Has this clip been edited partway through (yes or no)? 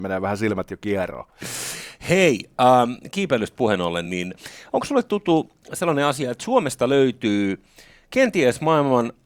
no